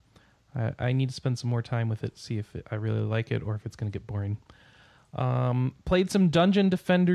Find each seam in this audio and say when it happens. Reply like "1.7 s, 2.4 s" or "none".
none